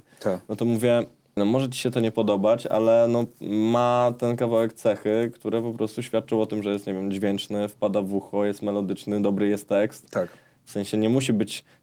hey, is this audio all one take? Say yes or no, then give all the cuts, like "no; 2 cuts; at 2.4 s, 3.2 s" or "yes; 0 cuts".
no; 1 cut; at 1.4 s